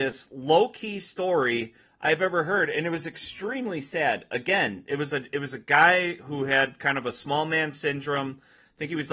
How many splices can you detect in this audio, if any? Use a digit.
0